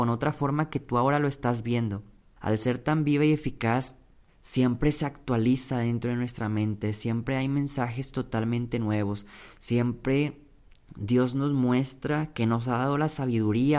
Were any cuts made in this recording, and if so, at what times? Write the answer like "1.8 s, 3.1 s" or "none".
2.4 s, 4.3 s